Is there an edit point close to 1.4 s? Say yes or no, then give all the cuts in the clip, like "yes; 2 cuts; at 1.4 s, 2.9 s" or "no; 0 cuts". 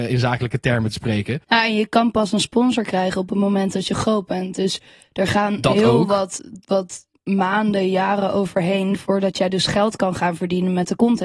yes; 1 cut; at 1.4 s